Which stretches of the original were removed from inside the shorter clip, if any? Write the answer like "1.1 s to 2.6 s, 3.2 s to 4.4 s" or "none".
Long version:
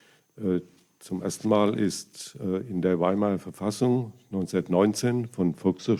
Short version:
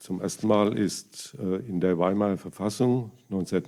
none